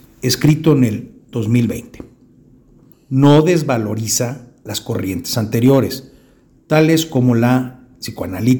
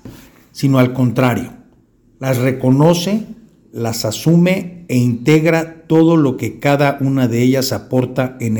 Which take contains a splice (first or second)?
first